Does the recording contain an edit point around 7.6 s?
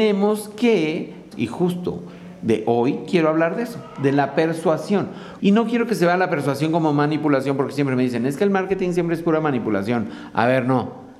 no; 2 cuts; at 1.3 s, 5.4 s

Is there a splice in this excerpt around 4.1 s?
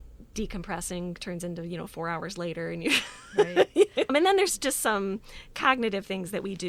yes; 1 cut; at 4.1 s

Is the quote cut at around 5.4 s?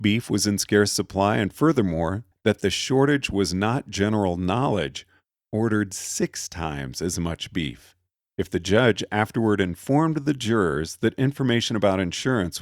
no; 2 cuts; at 2.3 s, 8.3 s

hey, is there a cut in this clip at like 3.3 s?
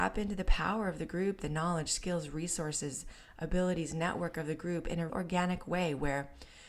no; 1 cut; at 5.1 s

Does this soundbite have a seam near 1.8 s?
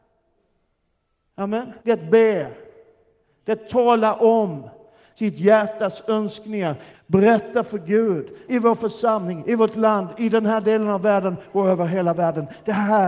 yes; 3 cuts; at 1.8 s, 6.9 s, 8.5 s

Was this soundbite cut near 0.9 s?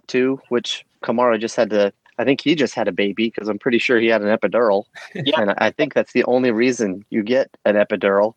yes; 1 cut; at 0.9 s

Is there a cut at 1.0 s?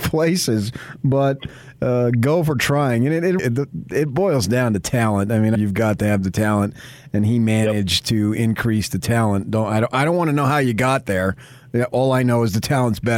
no; 2 cuts; at 3.4 s, 5.5 s

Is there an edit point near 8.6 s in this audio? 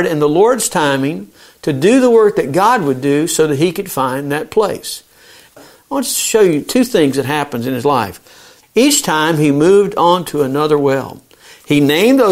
yes; 2 cuts; at 5.6 s, 8.6 s

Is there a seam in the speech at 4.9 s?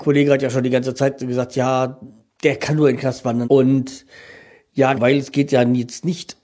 yes; 2 cuts; at 3.4 s, 4.9 s

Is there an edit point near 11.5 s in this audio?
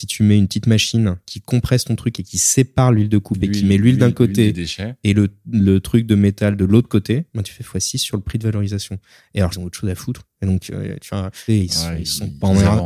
yes; 2 cuts; at 9.5 s, 11.5 s

